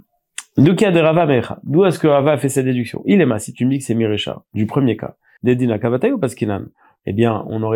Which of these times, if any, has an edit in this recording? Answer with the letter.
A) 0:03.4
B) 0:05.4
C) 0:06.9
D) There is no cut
B